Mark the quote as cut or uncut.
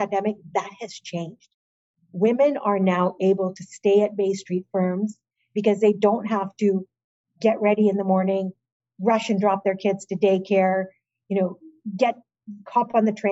uncut